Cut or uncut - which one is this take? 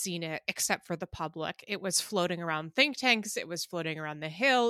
uncut